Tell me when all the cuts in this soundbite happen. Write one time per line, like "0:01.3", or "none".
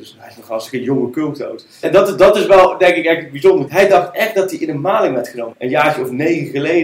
0:01.8
0:03.7
0:05.5

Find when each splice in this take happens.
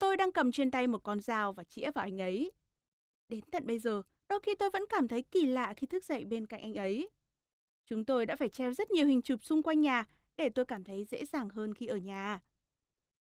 none

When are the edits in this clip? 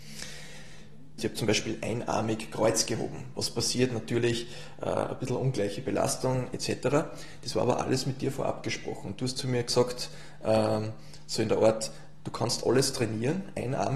0:01.2

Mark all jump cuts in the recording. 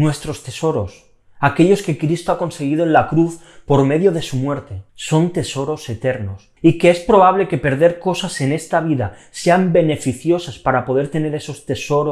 0:04.9
0:06.6

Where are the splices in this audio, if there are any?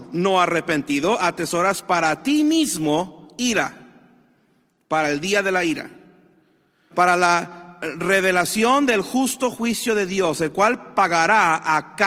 0:06.9

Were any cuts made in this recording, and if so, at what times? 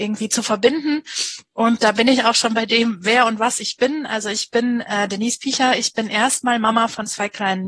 none

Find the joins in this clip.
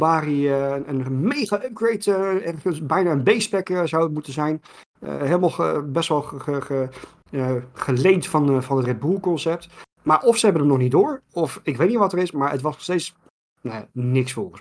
none

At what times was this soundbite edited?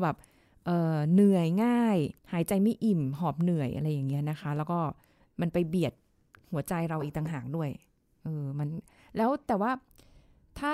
0:02.2

